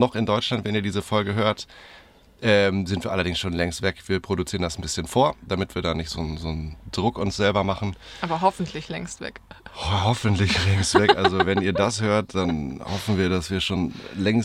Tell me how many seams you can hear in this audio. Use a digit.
0